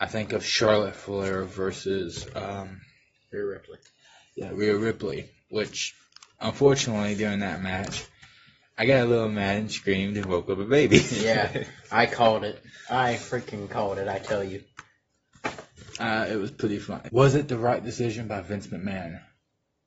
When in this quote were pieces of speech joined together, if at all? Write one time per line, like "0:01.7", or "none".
0:17.1

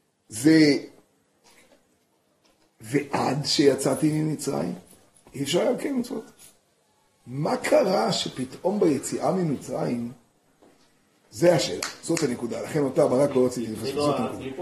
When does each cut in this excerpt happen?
none

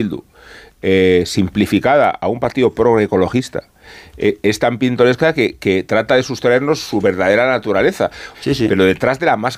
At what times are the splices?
0:08.3

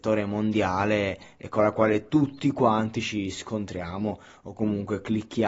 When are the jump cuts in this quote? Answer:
none

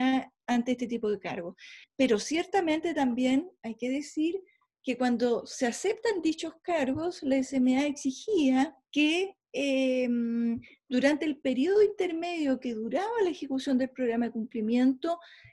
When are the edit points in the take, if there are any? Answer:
0:01.8
0:08.8

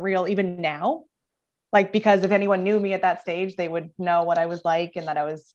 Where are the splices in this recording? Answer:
none

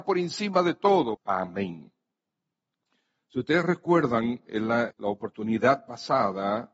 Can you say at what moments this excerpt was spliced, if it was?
0:01.1
0:04.9

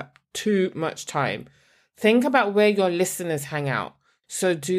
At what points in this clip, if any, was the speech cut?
none

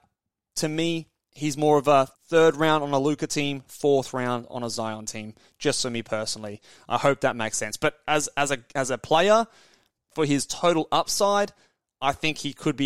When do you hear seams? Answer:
0:02.1

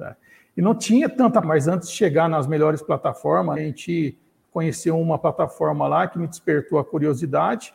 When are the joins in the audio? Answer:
0:01.4
0:03.6

